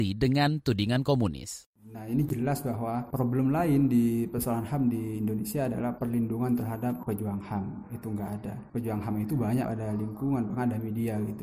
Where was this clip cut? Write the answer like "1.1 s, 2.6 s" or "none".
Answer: 9.6 s